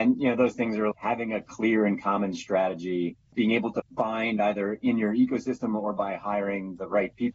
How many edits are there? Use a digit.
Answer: 1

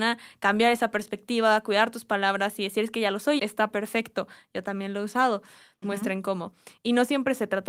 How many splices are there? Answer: 2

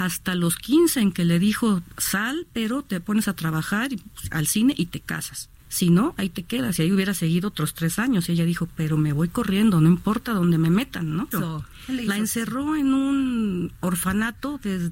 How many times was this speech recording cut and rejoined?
2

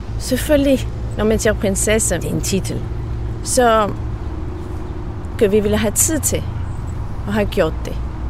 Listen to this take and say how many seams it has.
3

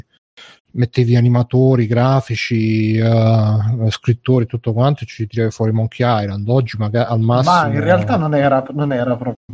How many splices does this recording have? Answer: 0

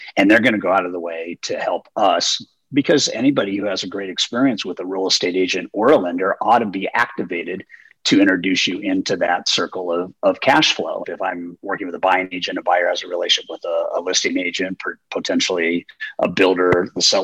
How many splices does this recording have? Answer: 1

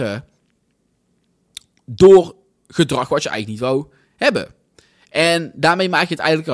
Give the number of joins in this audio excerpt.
0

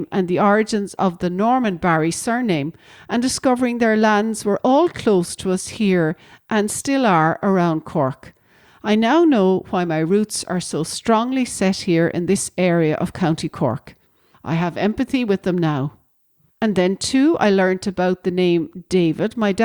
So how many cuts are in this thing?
2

